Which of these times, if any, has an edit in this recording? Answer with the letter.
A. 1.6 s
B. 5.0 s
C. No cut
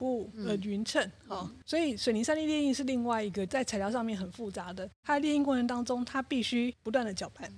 A